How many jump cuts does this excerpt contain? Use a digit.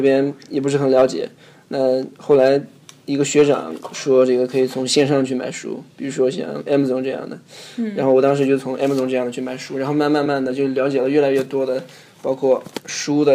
1